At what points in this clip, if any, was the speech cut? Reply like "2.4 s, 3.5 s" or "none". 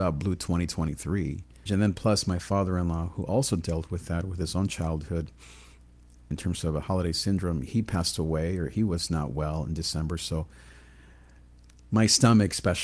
1.7 s